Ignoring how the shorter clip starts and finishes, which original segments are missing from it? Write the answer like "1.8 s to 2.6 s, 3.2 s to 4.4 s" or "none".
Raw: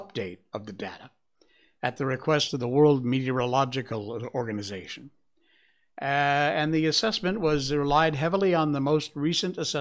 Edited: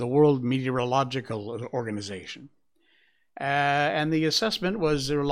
none